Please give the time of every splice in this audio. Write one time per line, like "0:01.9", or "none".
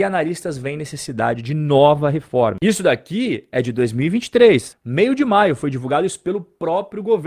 0:04.7